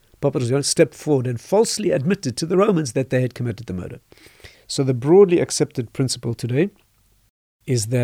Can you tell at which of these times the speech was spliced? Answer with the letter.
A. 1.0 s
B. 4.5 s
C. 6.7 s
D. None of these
B